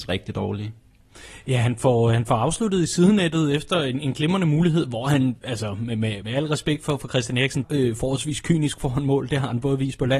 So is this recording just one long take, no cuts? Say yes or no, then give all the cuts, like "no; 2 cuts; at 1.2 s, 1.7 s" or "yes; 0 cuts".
no; 2 cuts; at 6.2 s, 7.6 s